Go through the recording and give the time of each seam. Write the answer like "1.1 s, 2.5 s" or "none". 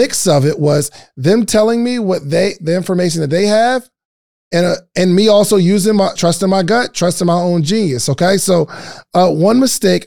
6.2 s